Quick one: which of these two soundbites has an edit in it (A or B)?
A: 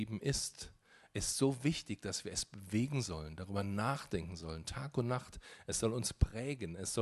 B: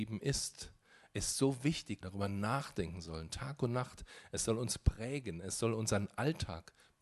B